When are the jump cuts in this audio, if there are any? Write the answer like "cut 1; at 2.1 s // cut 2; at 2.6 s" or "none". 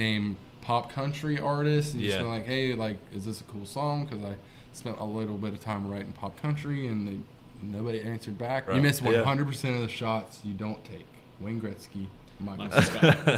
cut 1; at 8.7 s